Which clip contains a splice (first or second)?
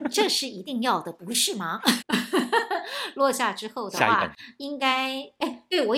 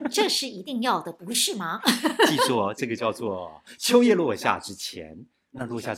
first